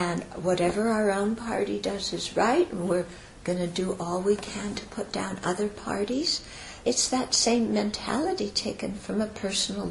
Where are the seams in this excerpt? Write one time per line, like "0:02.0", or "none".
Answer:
0:06.8